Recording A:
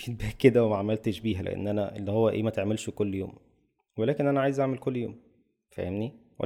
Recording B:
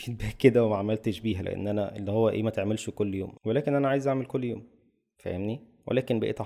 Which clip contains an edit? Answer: B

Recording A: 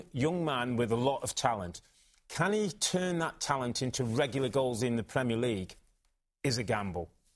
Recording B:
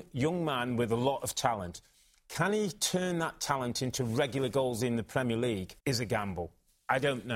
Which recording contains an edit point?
B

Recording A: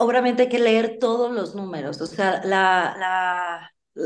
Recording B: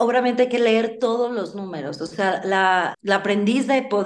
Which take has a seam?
B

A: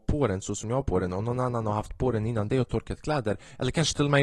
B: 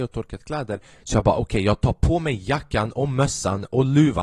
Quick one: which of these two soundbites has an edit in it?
B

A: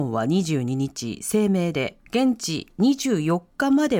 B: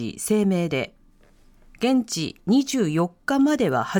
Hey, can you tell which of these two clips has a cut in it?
A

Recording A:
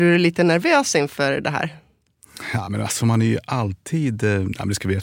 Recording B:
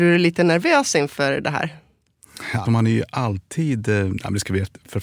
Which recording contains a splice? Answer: B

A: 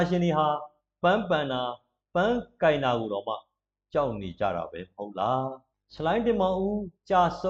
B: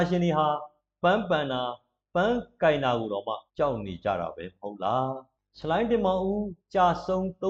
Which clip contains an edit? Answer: B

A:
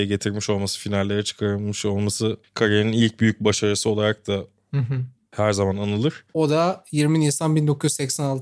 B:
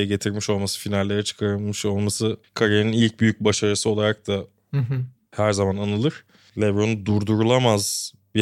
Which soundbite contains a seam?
A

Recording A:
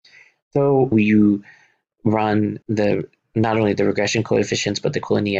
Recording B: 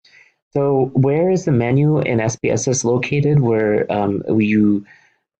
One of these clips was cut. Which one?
A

